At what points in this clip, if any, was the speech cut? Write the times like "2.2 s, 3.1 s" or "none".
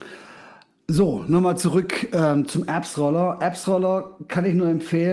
none